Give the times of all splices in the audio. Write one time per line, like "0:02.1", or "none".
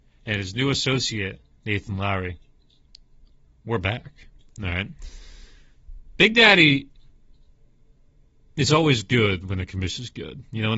none